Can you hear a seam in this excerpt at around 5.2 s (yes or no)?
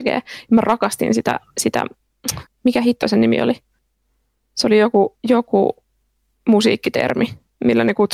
yes